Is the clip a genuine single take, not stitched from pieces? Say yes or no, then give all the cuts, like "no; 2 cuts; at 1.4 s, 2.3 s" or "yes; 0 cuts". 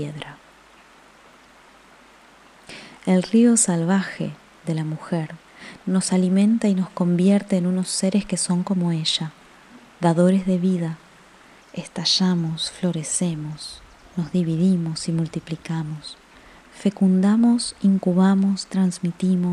no; 1 cut; at 11.6 s